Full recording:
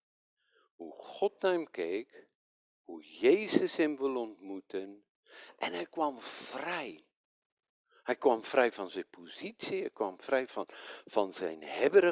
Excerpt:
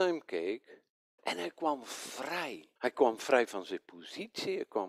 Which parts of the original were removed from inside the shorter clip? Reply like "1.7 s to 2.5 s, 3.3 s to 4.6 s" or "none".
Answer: 2.6 s to 5.5 s, 7.1 s to 8.0 s